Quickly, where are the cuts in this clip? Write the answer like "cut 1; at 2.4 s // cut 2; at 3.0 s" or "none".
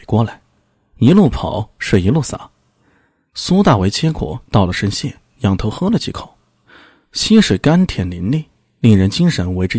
none